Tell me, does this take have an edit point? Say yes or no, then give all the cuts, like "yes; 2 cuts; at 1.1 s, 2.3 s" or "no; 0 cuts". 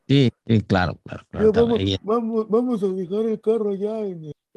no; 0 cuts